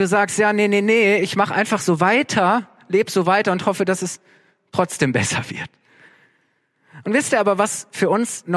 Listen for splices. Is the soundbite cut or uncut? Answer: uncut